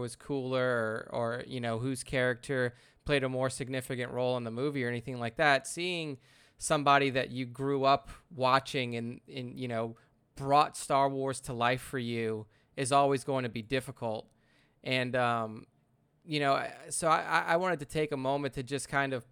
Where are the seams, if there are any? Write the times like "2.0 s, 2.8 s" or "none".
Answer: none